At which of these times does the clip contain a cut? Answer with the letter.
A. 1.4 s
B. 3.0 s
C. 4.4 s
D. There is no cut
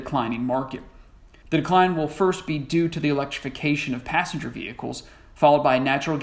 A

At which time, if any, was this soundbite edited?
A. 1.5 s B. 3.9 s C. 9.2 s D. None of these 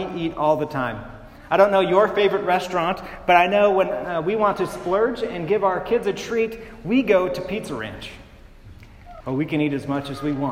C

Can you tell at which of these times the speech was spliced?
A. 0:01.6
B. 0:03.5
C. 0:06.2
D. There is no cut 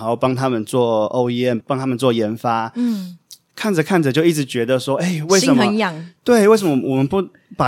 A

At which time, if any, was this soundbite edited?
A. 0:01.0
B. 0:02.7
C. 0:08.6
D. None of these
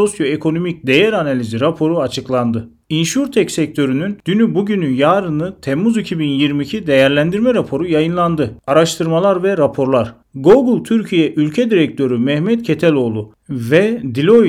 C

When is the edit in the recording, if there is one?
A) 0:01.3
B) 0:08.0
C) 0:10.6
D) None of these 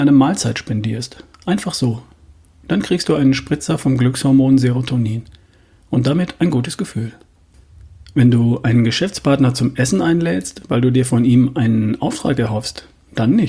D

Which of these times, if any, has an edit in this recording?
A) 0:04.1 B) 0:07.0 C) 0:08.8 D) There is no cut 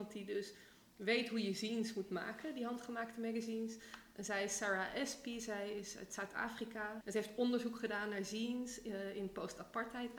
B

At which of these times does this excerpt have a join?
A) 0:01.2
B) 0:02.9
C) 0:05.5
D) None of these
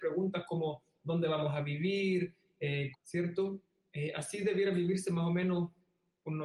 B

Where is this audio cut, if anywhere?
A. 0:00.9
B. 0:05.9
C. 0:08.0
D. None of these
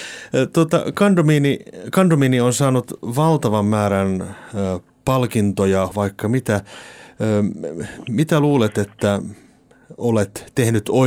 B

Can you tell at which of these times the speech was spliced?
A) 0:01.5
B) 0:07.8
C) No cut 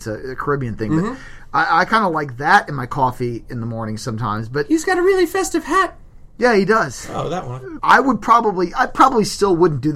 B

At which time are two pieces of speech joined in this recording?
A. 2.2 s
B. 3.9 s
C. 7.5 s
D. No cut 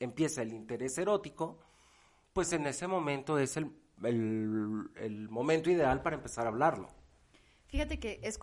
D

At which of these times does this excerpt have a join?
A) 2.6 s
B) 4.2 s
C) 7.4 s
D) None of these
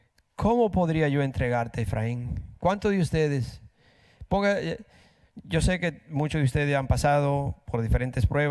D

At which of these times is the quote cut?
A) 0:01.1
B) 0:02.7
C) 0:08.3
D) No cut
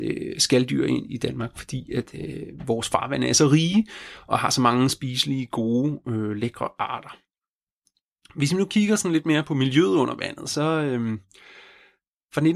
A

